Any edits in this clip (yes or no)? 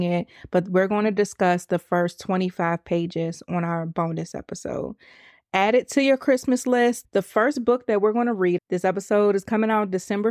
yes